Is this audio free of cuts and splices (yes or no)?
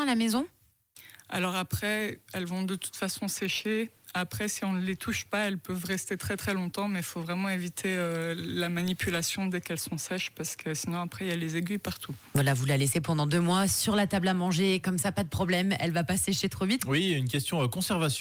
no